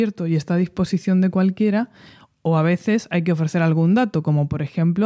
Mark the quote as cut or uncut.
uncut